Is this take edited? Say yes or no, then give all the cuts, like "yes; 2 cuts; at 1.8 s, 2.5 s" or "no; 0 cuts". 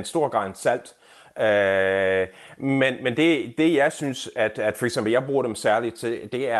no; 0 cuts